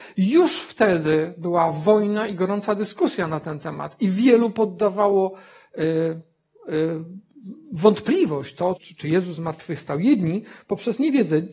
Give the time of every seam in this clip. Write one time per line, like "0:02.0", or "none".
0:08.8